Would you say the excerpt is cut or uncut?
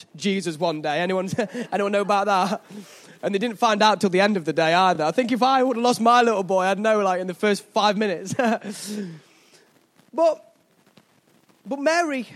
uncut